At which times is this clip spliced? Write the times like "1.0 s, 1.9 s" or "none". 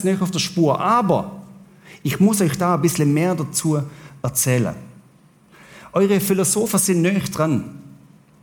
none